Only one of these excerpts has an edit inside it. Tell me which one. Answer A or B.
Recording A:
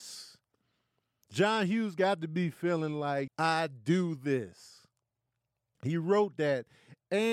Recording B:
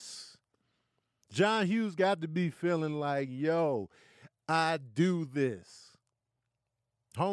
A